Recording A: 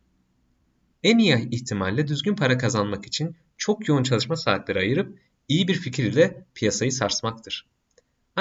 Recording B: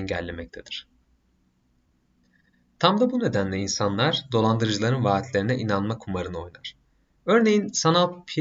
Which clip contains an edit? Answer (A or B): A